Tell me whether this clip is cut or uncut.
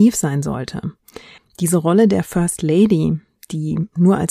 cut